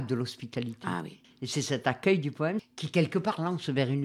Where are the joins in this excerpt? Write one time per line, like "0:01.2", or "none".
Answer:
0:01.2
0:02.6